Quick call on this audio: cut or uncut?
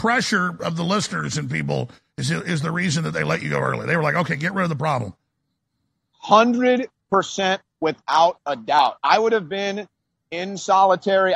uncut